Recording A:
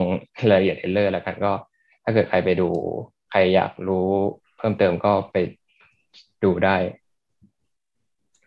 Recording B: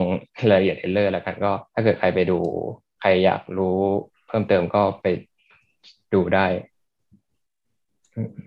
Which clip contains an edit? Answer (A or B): B